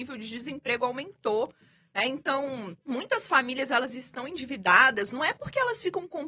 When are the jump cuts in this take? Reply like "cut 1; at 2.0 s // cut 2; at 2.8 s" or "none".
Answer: cut 1; at 2.8 s